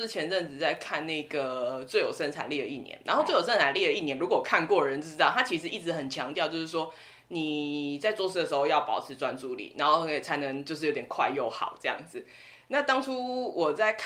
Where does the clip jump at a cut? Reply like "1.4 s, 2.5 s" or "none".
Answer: none